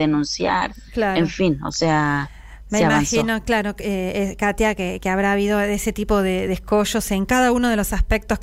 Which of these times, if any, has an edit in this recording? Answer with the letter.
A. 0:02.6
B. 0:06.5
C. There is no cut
C